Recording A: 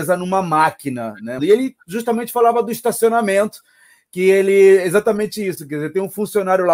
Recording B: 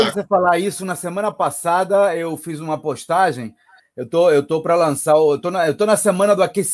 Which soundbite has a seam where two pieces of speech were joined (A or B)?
A